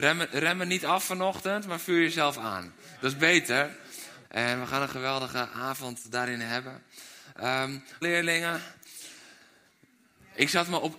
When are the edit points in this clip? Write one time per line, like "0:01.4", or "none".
0:04.2
0:08.0